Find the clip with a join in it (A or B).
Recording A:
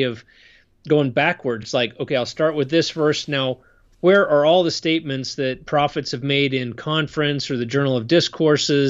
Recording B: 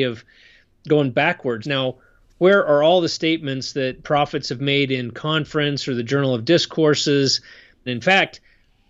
B